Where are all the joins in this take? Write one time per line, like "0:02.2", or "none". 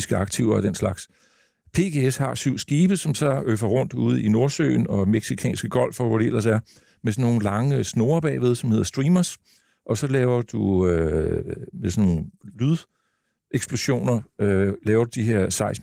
none

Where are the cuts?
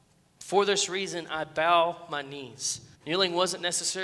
0:02.9

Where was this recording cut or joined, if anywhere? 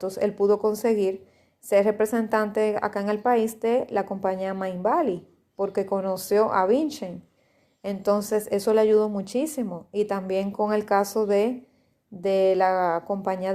none

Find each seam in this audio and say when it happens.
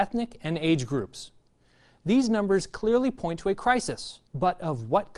0:04.3

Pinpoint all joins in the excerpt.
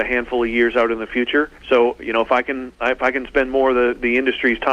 0:01.6

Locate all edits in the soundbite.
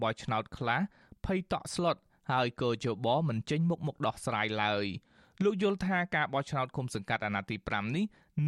none

